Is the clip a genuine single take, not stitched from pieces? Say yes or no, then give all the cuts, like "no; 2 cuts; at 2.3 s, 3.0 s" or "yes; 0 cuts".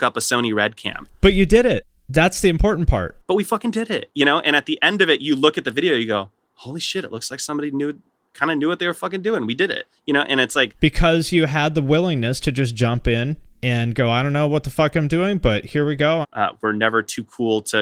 no; 1 cut; at 16.2 s